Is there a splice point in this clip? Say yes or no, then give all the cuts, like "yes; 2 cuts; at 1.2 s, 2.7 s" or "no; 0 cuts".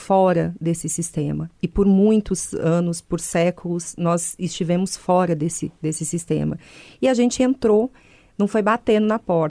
no; 0 cuts